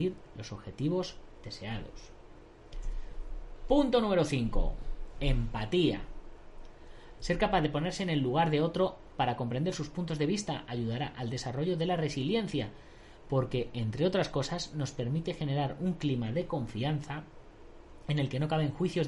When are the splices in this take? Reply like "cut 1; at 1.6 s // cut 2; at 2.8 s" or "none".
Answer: cut 1; at 7.1 s